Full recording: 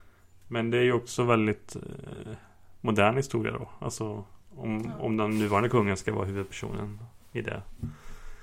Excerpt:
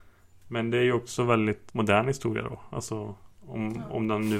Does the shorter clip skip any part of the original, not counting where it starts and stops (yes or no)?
yes